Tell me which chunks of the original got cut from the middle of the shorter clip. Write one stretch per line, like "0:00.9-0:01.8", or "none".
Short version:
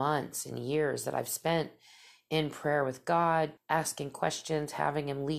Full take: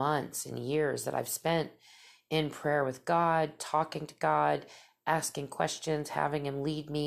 0:03.6-0:04.9